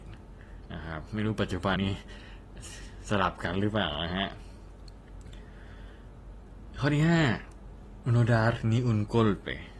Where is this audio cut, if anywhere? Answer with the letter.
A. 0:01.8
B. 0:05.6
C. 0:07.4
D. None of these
A